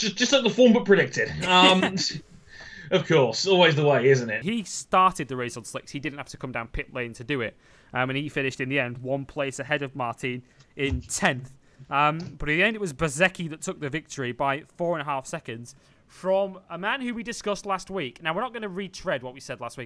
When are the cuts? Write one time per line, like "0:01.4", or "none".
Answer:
0:04.4